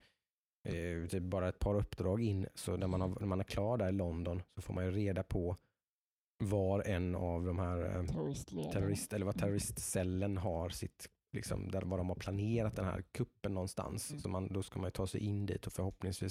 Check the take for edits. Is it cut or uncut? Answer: uncut